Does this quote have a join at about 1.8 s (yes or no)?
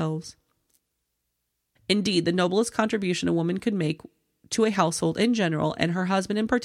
yes